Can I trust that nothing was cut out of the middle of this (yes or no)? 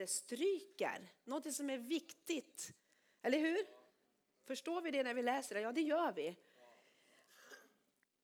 yes